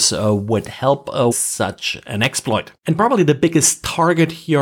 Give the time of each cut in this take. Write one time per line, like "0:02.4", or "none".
0:01.3
0:02.8